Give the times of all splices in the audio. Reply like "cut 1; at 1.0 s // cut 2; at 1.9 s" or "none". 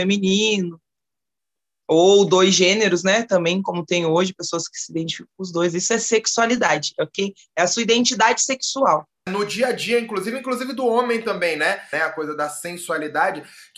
cut 1; at 9.3 s // cut 2; at 11.9 s